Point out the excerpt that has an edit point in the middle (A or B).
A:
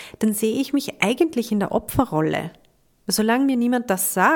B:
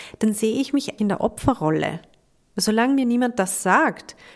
B